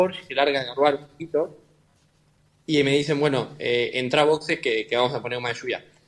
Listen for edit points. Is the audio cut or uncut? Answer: uncut